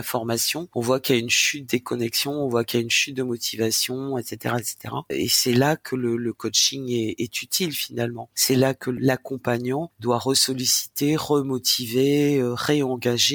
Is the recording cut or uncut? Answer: uncut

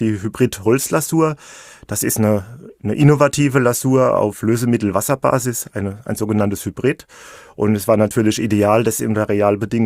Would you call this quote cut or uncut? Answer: uncut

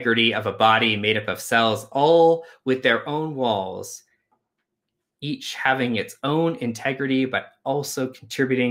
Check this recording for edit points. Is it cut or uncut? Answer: uncut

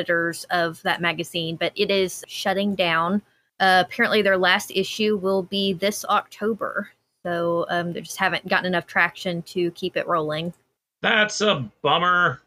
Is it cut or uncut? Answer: uncut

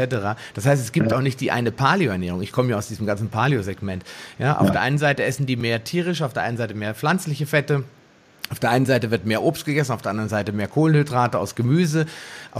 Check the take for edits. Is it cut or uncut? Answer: uncut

